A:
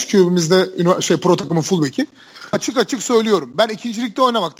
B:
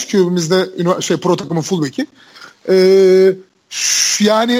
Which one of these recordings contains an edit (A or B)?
A